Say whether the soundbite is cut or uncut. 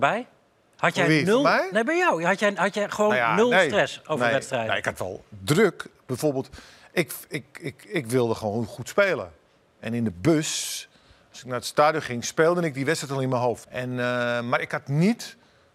cut